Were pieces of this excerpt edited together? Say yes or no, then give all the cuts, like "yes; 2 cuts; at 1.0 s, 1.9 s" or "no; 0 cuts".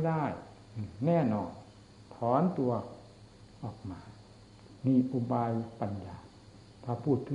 no; 0 cuts